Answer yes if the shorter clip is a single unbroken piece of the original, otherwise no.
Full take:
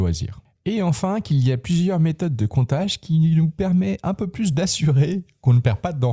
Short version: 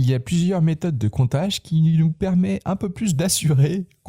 yes